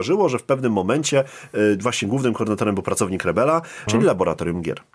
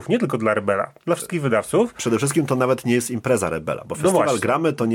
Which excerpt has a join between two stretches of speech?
first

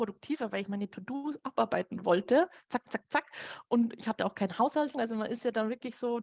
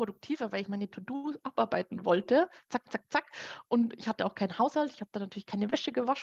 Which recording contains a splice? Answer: first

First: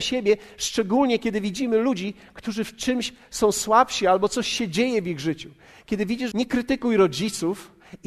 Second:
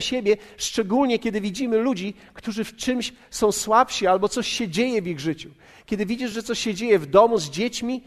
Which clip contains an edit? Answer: first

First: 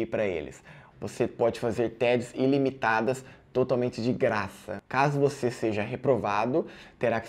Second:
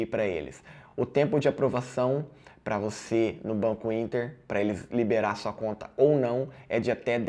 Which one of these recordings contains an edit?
first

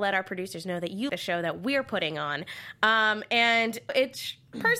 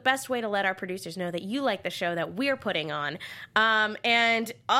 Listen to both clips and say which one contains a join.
first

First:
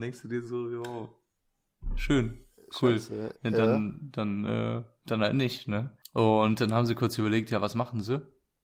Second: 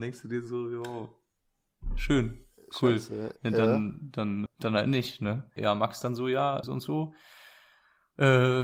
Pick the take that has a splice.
second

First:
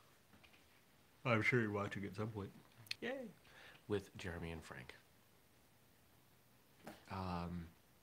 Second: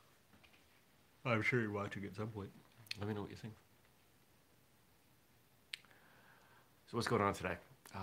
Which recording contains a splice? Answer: first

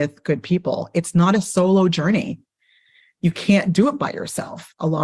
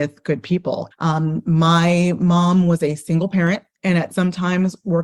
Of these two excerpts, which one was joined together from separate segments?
second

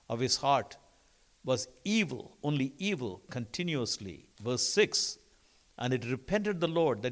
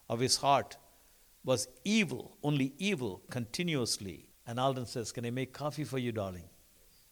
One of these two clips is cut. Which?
second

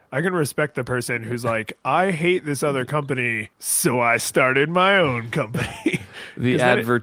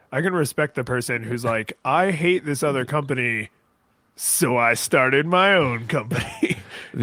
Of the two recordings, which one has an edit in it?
first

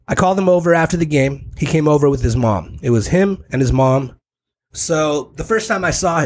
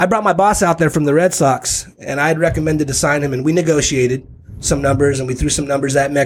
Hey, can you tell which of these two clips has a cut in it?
first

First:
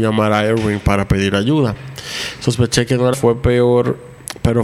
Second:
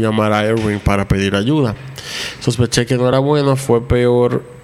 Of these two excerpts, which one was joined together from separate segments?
first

